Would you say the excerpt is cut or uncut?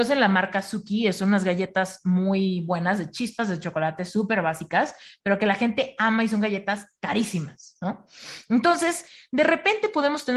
uncut